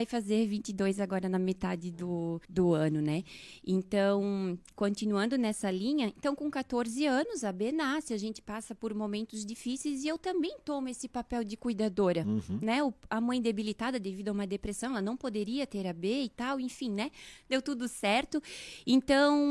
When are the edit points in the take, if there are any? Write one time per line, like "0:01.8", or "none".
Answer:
0:02.4